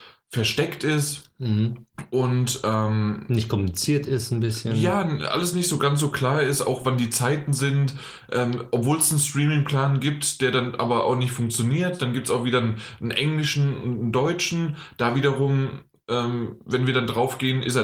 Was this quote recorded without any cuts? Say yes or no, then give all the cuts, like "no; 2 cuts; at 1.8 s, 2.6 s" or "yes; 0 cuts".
yes; 0 cuts